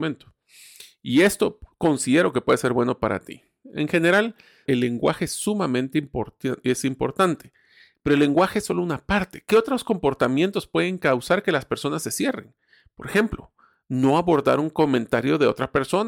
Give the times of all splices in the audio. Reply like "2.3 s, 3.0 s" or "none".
4.7 s